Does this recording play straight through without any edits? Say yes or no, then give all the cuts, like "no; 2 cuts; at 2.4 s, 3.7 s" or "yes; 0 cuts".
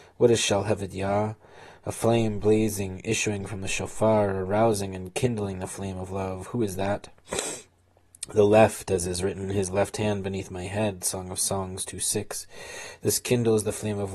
yes; 0 cuts